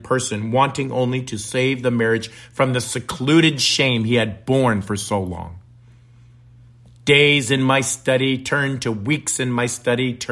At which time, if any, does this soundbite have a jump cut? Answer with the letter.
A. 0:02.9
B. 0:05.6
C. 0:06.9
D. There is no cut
D